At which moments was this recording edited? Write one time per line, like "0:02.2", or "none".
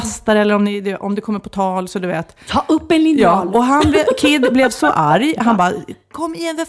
none

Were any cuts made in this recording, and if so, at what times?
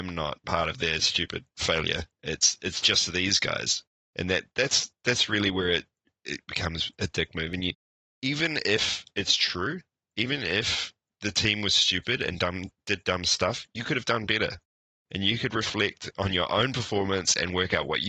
none

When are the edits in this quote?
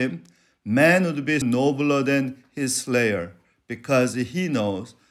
0:01.4

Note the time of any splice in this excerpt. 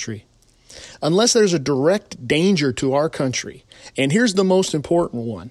0:03.9

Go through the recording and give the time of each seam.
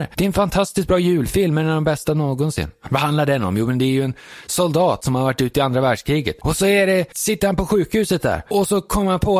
none

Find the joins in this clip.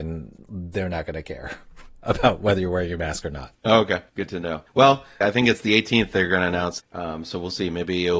0:05.2
0:06.8

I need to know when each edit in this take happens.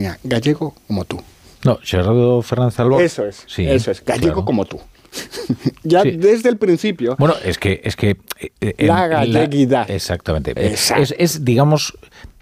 0:10.6

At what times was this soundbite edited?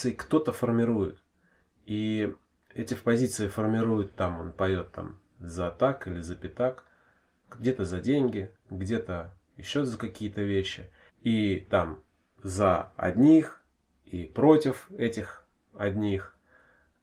0:11.1

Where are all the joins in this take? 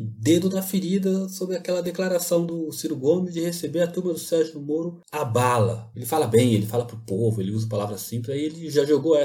0:05.9

